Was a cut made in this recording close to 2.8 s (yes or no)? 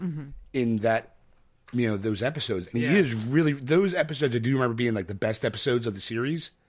no